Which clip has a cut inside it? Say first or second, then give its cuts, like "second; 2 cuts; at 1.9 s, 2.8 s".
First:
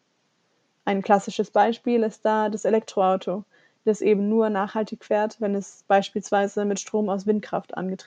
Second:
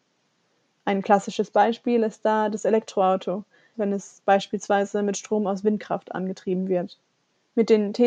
second; 1 cut; at 3.7 s